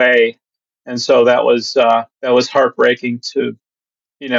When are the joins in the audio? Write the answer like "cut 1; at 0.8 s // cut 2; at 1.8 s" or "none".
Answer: cut 1; at 2.1 s // cut 2; at 3.3 s